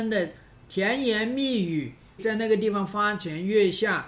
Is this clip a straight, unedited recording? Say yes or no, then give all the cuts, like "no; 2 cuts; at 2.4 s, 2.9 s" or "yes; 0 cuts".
no; 1 cut; at 2.2 s